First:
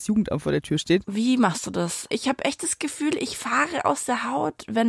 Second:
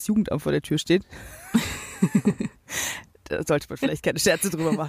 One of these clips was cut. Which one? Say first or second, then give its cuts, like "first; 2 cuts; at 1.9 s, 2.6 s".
first; 2 cuts; at 1.0 s, 2.1 s